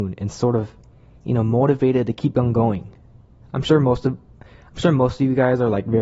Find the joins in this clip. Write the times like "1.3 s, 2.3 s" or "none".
3.4 s